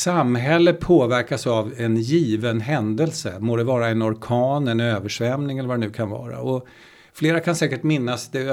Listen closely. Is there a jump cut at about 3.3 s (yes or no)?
no